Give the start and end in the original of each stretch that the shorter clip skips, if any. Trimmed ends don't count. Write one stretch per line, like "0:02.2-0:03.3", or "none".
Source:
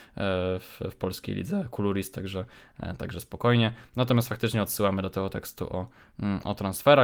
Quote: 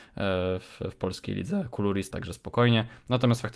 0:02.1-0:03.0